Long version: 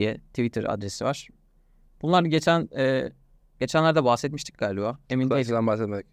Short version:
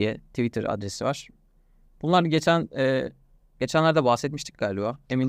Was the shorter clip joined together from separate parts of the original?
no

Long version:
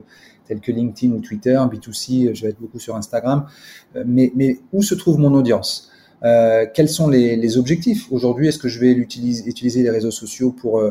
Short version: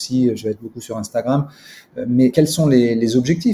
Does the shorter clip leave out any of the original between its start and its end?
yes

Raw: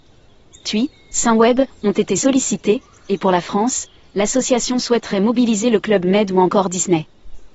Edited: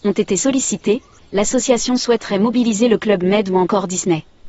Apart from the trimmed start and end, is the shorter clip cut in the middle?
yes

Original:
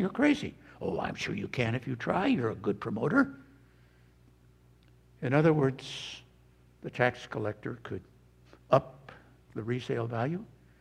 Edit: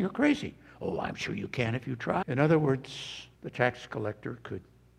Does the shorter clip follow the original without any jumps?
no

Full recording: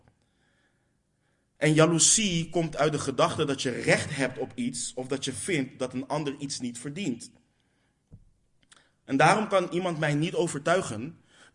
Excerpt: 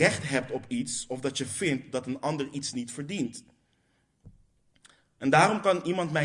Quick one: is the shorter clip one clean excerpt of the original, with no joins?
yes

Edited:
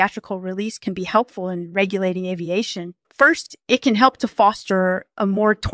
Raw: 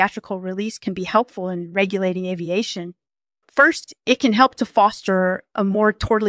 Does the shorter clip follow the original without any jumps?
no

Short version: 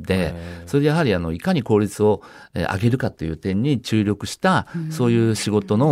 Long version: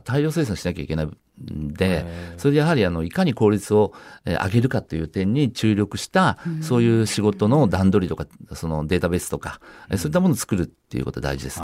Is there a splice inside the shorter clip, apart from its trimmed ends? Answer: no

